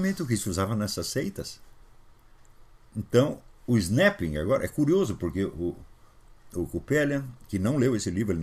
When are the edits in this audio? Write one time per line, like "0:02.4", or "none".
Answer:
none